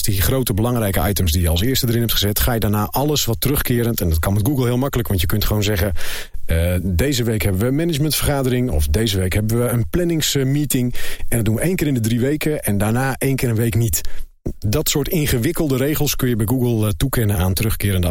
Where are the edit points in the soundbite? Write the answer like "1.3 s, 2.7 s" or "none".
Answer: none